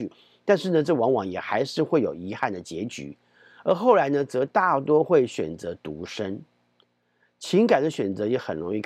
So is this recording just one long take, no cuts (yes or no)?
yes